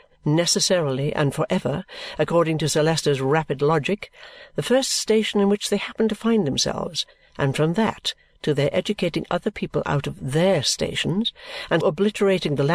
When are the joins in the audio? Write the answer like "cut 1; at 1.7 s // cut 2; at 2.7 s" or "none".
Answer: cut 1; at 11.8 s